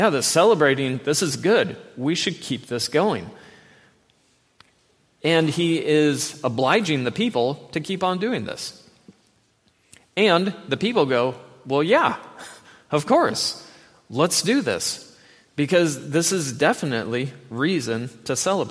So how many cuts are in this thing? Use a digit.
0